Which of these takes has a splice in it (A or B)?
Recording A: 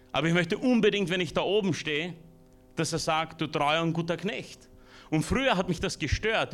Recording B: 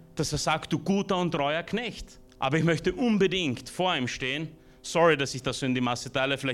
B